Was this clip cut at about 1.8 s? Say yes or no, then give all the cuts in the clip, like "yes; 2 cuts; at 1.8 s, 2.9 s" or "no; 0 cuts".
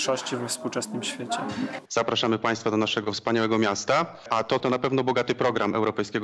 yes; 2 cuts; at 1.8 s, 4.6 s